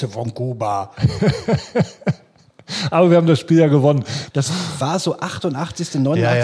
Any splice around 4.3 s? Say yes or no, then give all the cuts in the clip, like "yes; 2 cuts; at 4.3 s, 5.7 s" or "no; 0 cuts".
yes; 1 cut; at 4.3 s